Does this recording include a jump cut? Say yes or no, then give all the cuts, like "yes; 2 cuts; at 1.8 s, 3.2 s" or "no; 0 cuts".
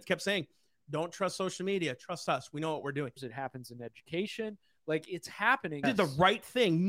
yes; 2 cuts; at 3.2 s, 5.8 s